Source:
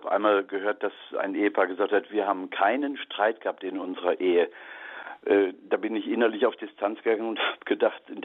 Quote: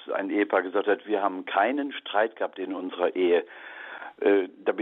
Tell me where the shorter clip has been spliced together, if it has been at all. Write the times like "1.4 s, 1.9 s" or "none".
none